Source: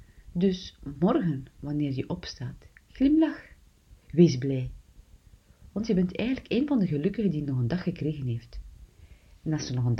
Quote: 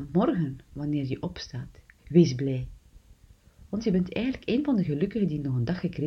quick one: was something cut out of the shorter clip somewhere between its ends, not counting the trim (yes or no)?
yes